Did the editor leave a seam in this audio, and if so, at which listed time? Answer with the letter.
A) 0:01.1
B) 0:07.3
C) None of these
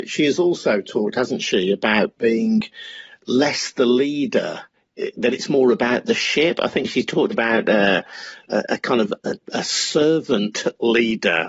B